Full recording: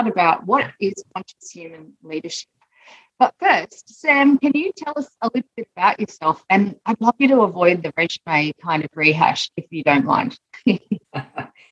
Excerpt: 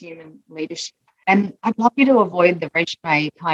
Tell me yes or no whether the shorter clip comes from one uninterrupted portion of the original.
no